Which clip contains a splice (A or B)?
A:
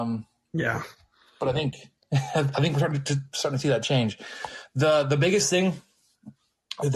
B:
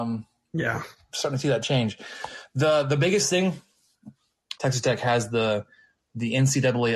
B